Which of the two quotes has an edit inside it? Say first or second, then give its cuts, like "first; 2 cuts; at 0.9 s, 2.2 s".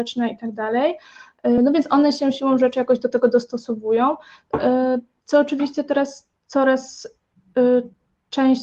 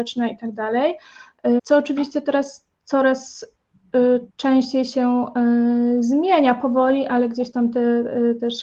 second; 2 cuts; at 1.6 s, 4.3 s